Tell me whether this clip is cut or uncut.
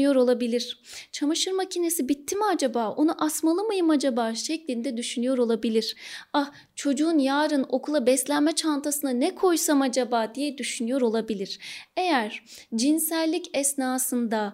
uncut